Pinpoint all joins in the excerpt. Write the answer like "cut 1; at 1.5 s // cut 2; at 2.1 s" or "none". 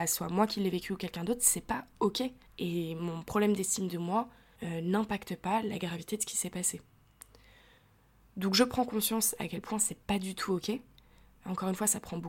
cut 1; at 2.5 s